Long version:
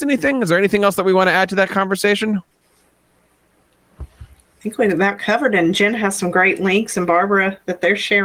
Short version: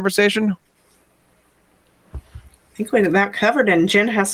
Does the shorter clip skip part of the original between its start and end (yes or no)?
no